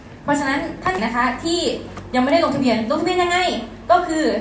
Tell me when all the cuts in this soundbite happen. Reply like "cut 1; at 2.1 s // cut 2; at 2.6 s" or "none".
cut 1; at 1.0 s

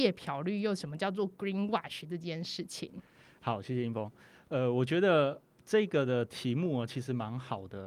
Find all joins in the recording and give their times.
none

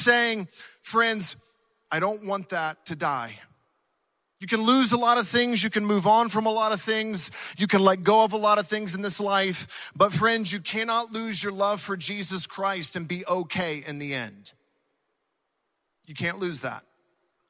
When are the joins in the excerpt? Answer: none

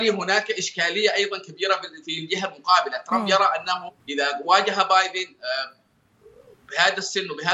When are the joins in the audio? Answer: cut 1; at 4.0 s

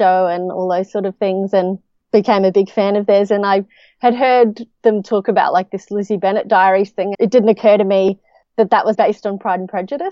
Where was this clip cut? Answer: cut 1; at 7.1 s // cut 2; at 8.9 s

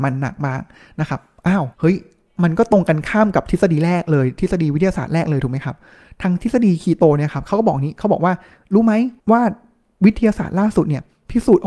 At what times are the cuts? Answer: cut 1; at 1.7 s // cut 2; at 9.2 s

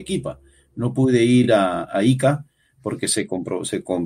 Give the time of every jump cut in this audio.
none

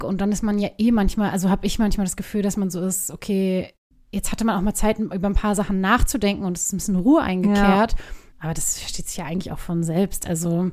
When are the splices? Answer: cut 1; at 8.3 s

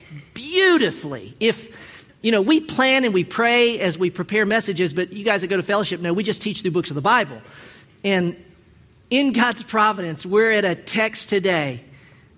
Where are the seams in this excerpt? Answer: none

